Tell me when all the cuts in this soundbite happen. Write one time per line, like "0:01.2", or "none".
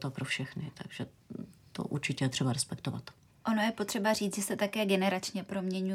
none